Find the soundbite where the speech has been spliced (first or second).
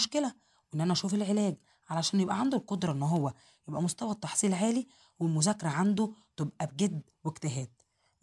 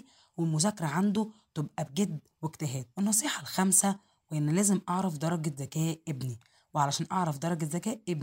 second